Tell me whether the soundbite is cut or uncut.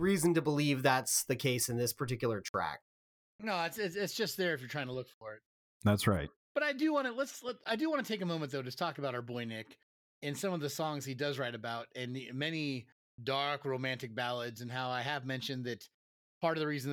cut